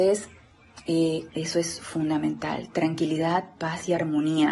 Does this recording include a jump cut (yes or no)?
yes